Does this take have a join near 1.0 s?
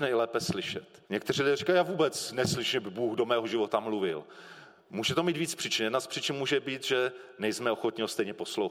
yes; 1 cut; at 1.0 s

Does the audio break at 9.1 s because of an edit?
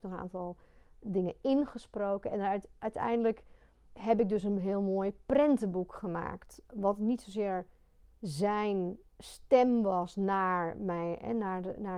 yes; 2 cuts; at 3.9 s, 9.1 s

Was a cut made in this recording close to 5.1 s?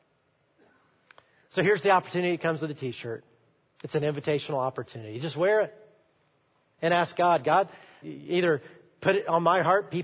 no; 1 cut; at 8.0 s

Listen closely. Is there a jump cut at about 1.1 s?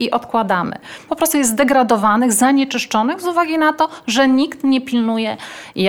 yes; 1 cut; at 1.1 s

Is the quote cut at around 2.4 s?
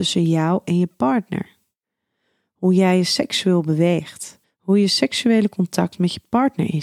no; 1 cut; at 4.4 s

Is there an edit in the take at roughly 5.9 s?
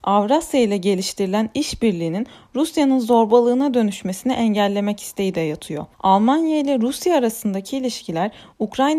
yes; 1 cut; at 5.9 s

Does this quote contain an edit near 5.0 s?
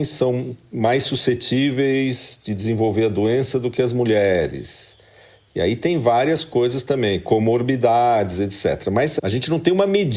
no; 0 cuts

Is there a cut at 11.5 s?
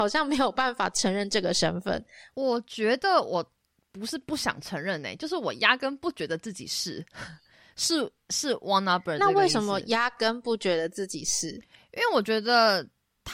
no; 1 cut; at 2.3 s

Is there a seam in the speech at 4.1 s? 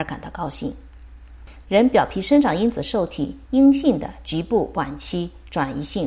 no; 1 cut; at 1.6 s

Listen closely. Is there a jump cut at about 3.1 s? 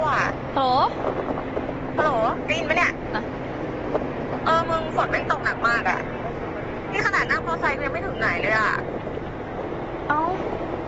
yes; 1 cut; at 3.1 s

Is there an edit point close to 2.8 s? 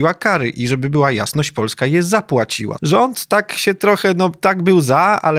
yes; 1 cut; at 2.8 s

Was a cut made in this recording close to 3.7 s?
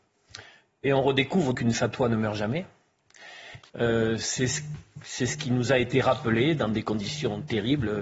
yes; 2 cuts; at 1.5 s, 3.7 s

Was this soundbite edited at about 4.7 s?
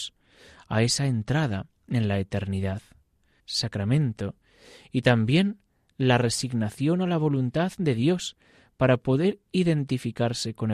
no; 1 cut; at 3.4 s

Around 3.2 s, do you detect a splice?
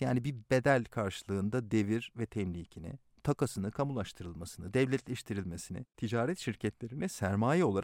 yes; 1 cut; at 3.2 s

